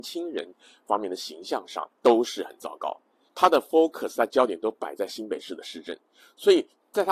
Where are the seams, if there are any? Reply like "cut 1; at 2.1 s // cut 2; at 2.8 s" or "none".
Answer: cut 1; at 1.9 s // cut 2; at 3.3 s